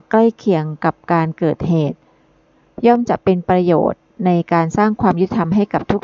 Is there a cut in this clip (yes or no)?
no